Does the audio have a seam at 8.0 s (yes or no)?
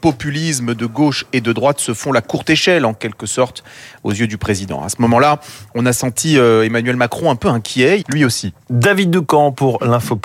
yes